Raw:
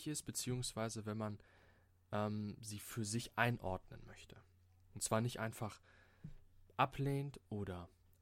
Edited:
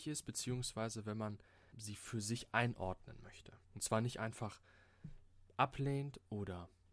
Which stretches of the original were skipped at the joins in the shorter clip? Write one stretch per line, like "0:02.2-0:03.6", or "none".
0:01.7-0:02.6
0:04.5-0:04.8